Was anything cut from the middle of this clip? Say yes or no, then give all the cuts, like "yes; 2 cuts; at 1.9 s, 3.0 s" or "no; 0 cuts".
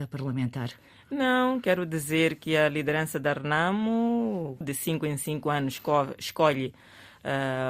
yes; 1 cut; at 4.6 s